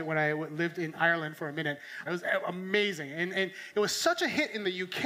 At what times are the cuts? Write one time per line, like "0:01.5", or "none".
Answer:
0:02.1